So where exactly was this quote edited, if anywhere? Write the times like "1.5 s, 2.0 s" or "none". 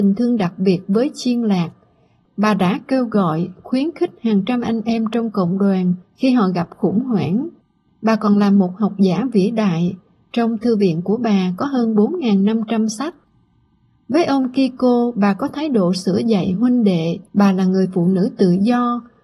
7.9 s, 17.3 s